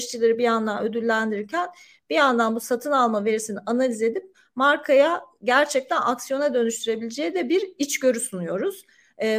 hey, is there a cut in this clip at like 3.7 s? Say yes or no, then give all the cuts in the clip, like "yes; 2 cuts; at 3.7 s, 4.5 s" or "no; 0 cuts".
no; 0 cuts